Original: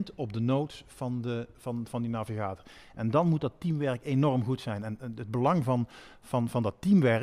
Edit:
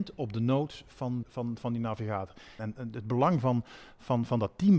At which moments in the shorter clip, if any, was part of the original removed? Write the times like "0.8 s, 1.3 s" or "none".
1.2 s, 2.6 s